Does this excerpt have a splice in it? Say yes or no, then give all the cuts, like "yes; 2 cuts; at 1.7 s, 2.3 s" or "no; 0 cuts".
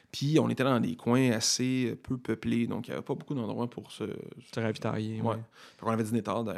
no; 0 cuts